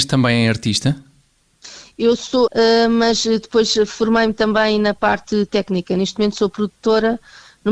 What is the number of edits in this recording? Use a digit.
1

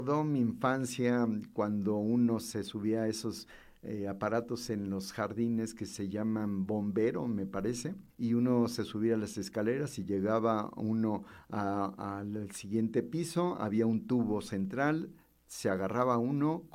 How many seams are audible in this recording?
1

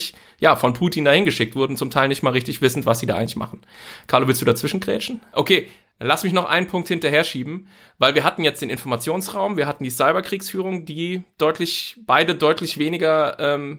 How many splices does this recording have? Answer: 1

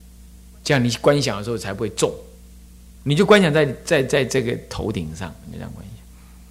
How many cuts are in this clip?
0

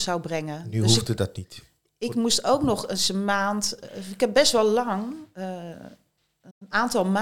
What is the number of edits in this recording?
0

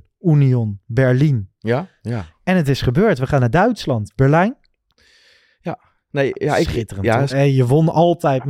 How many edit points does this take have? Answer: 2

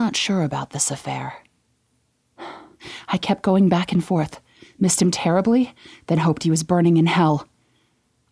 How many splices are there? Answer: 0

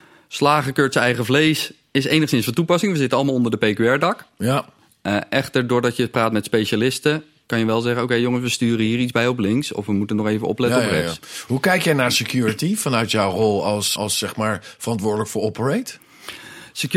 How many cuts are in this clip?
1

